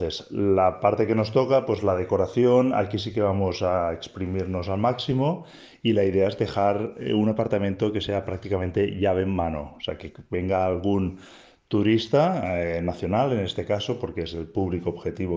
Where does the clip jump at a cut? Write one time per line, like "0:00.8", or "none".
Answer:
none